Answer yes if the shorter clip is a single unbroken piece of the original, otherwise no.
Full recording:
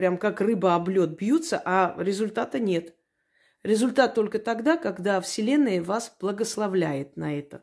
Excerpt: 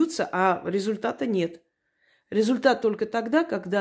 yes